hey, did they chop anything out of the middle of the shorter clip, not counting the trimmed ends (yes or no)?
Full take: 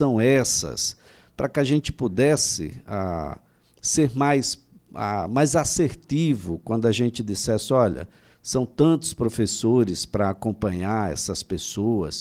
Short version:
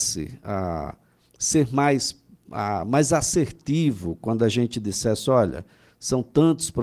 no